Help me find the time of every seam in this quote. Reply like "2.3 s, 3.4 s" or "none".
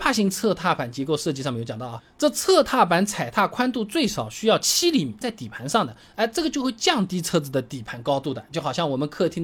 5.2 s